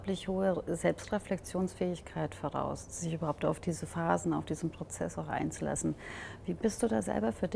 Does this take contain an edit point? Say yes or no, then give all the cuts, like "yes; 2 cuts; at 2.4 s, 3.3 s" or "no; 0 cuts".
no; 0 cuts